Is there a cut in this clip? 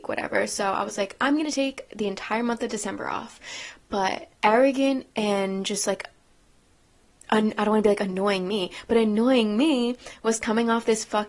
yes; 1 cut; at 4.3 s

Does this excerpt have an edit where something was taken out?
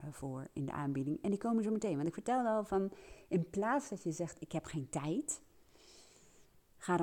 no; 0 cuts

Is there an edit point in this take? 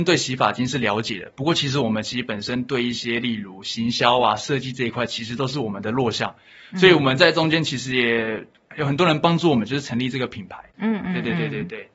no; 0 cuts

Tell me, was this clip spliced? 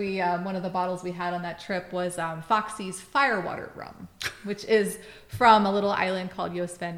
no; 0 cuts

